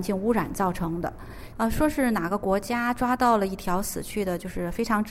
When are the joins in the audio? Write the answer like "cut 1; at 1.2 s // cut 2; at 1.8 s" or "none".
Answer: cut 1; at 1.5 s